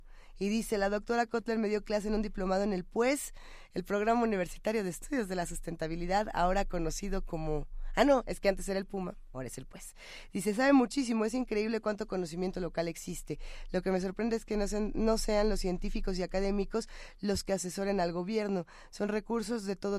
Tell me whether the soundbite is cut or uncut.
uncut